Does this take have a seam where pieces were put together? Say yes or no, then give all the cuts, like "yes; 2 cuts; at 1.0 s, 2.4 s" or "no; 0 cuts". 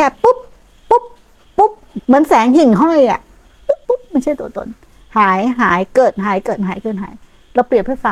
yes; 2 cuts; at 2.0 s, 3.8 s